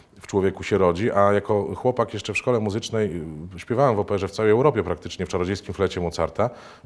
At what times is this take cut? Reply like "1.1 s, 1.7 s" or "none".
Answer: none

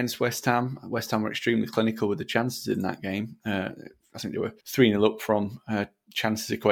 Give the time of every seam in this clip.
4.6 s

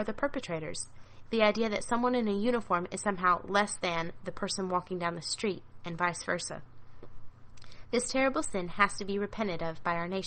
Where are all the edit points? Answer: 1.3 s

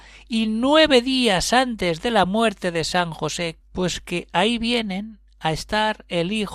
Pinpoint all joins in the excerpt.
3.6 s

